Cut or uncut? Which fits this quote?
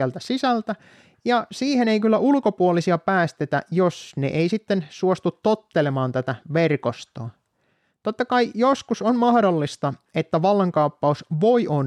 uncut